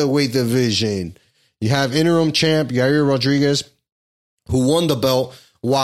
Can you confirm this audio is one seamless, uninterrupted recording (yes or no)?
yes